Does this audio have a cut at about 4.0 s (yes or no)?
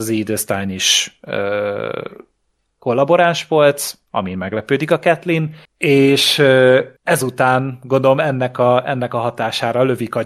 no